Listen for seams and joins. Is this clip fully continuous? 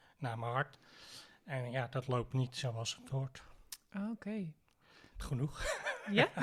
no; 1 cut; at 5.1 s

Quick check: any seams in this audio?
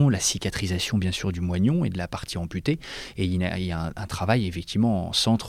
no; 0 cuts

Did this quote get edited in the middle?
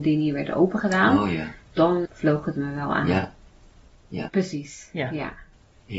yes; 2 cuts; at 2.0 s, 4.3 s

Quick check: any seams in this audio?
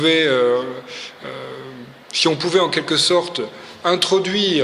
yes; 1 cut; at 2.0 s

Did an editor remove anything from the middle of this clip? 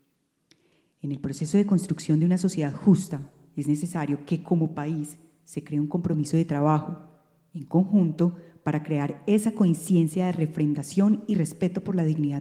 no; 0 cuts

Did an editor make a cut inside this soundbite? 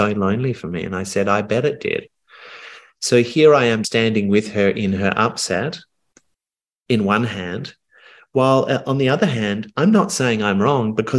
yes; 1 cut; at 3.8 s

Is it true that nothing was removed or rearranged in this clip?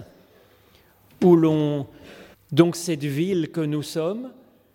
no; 1 cut; at 2.3 s

